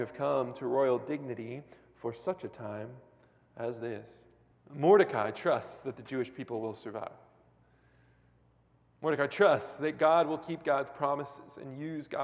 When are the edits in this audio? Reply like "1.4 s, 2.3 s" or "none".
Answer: 4.5 s